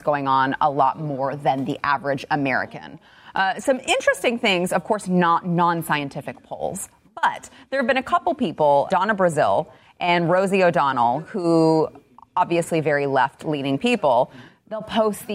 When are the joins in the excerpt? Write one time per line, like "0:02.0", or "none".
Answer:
0:08.9